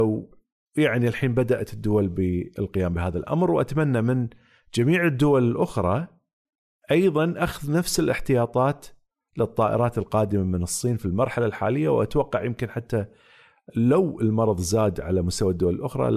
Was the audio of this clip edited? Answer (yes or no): no